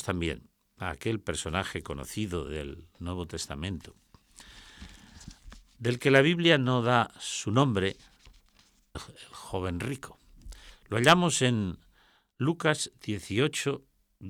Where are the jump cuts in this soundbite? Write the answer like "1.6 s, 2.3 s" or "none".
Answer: 8.9 s